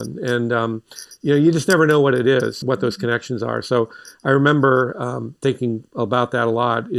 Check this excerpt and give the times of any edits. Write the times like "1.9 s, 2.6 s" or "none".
2.6 s

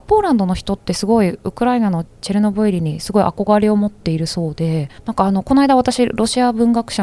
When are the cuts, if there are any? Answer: 5.0 s

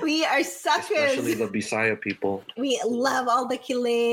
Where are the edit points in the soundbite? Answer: 2.6 s

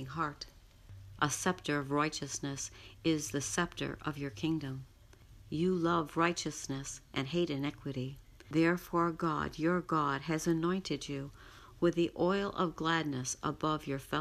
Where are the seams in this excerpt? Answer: 1.2 s

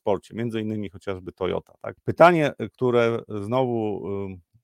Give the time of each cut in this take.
2.0 s

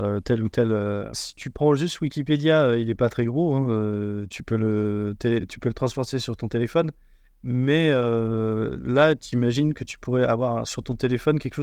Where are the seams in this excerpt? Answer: 1.1 s

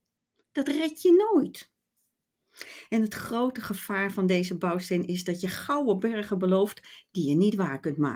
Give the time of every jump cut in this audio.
none

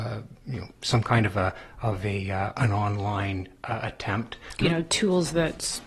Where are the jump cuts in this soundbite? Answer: 4.6 s

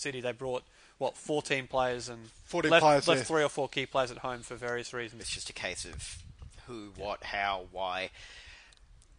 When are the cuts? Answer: 5.2 s

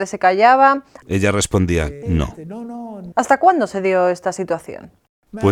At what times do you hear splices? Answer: 1.0 s, 2.0 s, 3.1 s

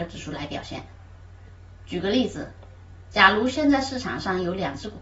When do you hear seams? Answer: none

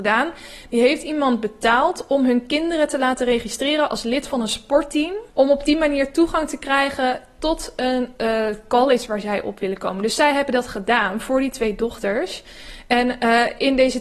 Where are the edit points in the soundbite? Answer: 5.3 s

